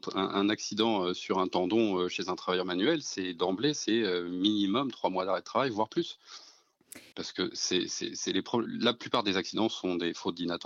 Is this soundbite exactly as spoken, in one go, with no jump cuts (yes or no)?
no